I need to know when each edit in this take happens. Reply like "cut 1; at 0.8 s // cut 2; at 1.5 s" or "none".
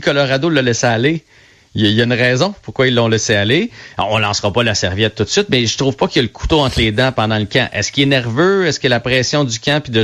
none